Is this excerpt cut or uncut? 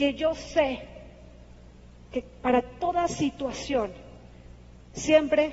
uncut